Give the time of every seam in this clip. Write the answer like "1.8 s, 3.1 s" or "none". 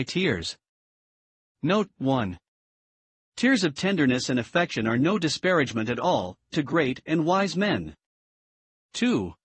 6.5 s